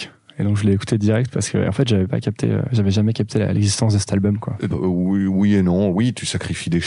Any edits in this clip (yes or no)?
yes